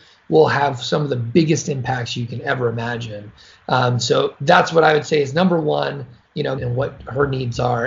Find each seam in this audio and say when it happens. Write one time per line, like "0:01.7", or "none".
0:06.6